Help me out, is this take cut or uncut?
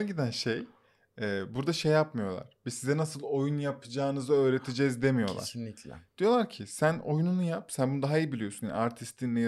uncut